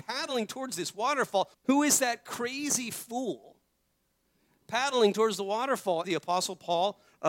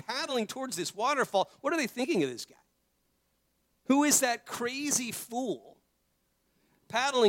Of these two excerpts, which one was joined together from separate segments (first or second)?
first